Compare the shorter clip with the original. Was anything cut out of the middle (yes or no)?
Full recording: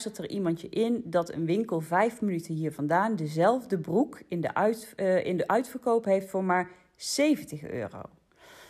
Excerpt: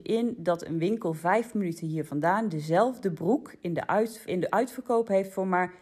yes